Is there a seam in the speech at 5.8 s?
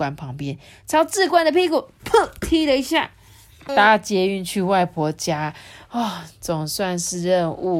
no; 1 cut; at 3.7 s

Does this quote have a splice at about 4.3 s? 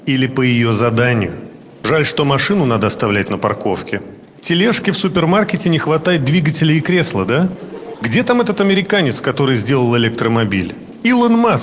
no; 1 cut; at 7.9 s

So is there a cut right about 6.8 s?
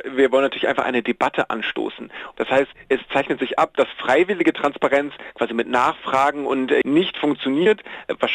yes; 2 cuts; at 2.3 s, 6.8 s

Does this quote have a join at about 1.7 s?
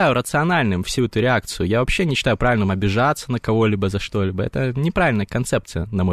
no; 0 cuts

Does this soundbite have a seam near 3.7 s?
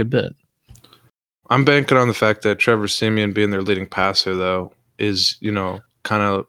no; 1 cut; at 1.4 s

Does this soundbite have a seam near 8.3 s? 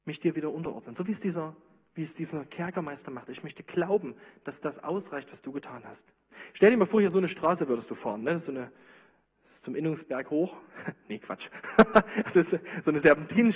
no; 0 cuts

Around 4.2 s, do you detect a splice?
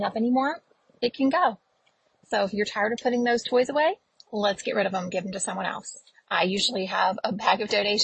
no; 1 cut; at 6.1 s

